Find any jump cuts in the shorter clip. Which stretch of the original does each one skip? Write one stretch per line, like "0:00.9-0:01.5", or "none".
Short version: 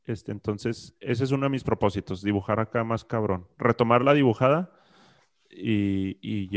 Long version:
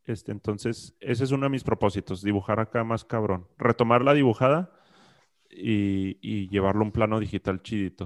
none